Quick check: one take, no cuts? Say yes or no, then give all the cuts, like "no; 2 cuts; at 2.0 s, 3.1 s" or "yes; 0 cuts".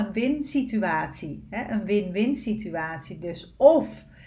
yes; 0 cuts